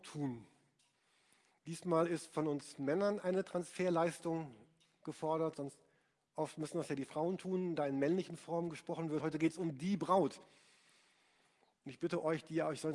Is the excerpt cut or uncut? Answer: uncut